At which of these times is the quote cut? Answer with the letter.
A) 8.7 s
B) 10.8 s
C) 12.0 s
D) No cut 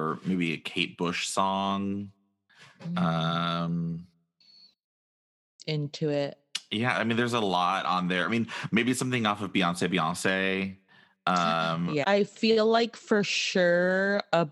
C